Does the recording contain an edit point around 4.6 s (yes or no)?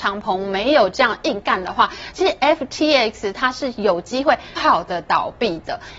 yes